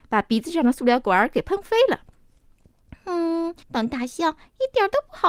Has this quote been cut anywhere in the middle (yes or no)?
yes